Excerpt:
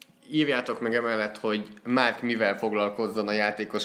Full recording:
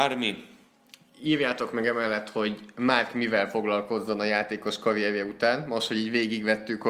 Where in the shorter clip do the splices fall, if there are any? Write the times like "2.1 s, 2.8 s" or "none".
none